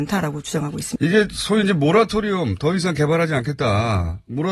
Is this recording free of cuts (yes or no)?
no